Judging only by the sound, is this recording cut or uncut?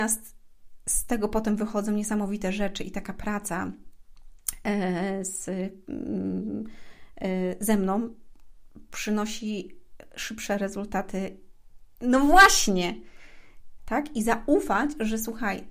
cut